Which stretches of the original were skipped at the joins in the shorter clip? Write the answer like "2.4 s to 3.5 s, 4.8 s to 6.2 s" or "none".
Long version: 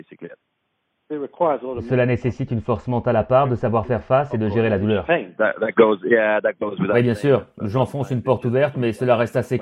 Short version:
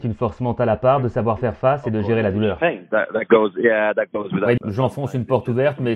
7.0 s to 7.5 s